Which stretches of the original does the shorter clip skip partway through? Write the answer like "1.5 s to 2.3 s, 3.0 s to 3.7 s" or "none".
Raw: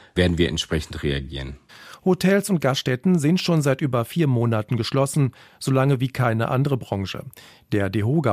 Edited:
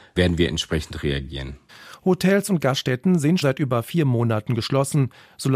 3.4 s to 3.6 s